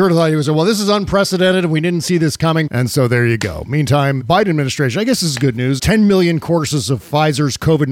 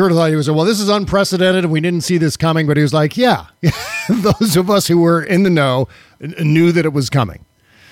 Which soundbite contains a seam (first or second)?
first